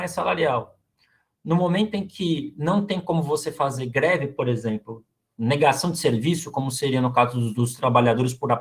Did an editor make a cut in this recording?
no; 0 cuts

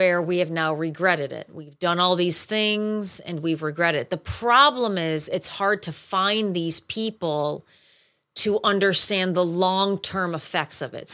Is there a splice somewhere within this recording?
no; 0 cuts

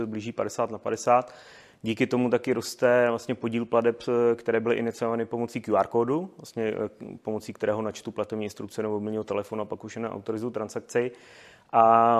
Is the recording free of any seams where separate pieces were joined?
yes; 0 cuts

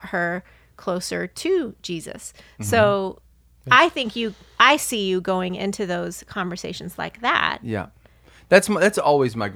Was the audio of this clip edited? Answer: no; 0 cuts

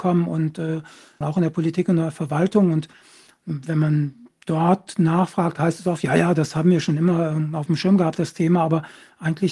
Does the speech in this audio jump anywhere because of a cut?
yes; 1 cut; at 1.2 s

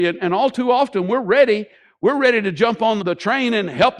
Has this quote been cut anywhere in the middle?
yes; 1 cut; at 3.0 s

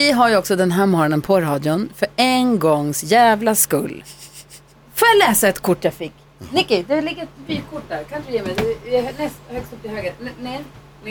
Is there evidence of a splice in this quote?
no; 0 cuts

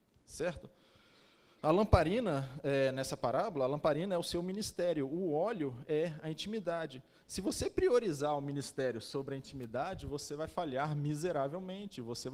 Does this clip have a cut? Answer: no; 0 cuts

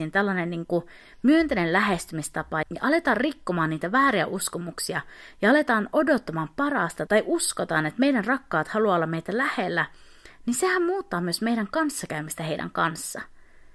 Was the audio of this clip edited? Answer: yes; 2 cuts; at 2.6 s, 7.1 s

